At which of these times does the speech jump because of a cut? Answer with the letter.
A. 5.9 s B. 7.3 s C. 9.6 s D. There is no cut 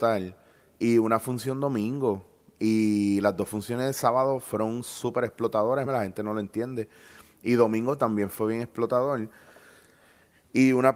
A